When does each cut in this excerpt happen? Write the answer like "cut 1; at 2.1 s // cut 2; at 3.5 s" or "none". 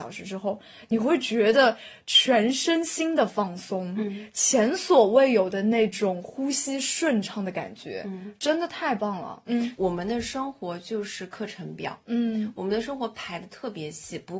cut 1; at 9.5 s